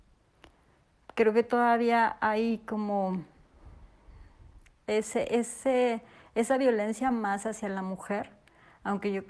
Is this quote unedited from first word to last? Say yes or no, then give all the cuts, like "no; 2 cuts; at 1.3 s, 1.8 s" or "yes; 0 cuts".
yes; 0 cuts